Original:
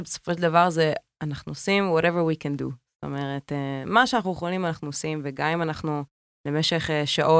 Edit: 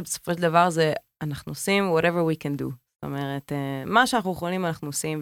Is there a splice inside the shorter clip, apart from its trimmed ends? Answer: no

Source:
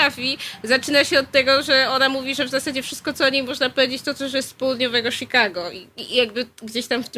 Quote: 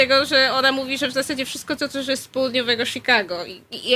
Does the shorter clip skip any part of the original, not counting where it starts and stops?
yes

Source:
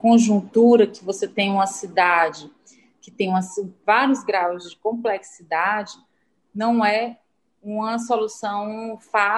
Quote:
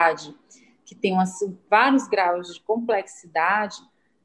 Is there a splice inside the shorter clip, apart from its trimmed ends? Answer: no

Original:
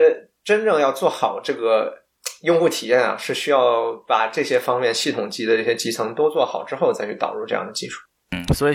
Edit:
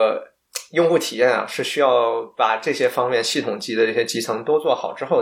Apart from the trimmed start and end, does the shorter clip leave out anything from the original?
no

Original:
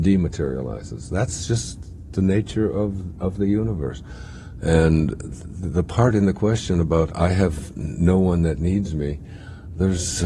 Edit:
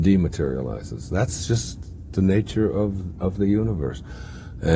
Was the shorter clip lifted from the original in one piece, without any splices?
yes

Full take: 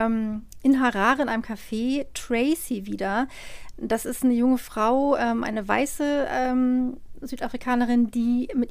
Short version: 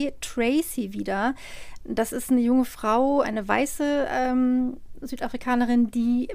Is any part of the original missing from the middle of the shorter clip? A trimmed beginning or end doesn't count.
yes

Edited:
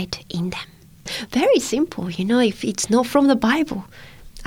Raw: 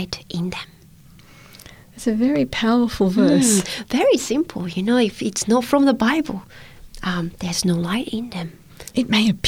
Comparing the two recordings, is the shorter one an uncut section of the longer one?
no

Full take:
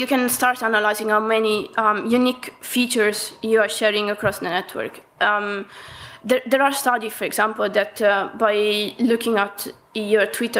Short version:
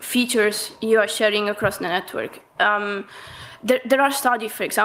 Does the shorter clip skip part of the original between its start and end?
no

